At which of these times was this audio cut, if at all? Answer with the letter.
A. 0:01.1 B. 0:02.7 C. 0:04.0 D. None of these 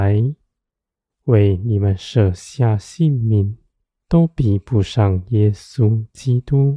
C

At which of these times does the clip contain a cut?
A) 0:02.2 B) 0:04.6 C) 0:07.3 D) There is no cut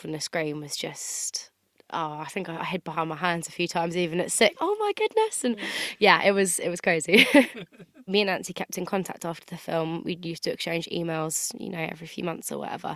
B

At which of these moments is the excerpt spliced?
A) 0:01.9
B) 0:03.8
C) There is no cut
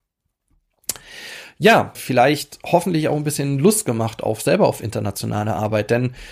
A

